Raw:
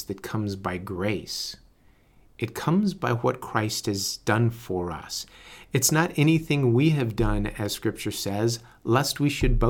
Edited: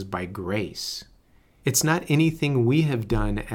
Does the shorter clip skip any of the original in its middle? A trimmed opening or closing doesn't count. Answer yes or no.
yes